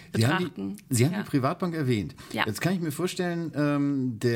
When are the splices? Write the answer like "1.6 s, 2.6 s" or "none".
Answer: none